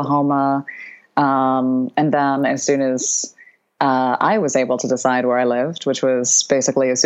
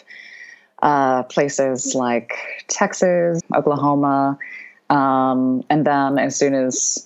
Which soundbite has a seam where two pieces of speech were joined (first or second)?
second